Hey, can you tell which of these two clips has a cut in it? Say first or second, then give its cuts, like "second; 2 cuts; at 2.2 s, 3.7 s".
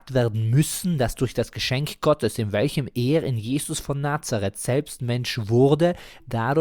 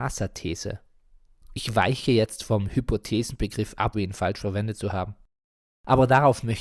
second; 1 cut; at 3.9 s